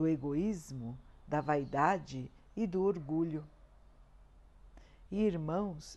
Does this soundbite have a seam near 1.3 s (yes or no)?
no